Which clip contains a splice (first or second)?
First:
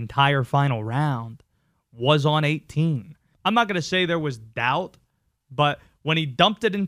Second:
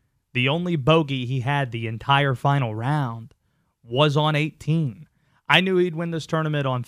first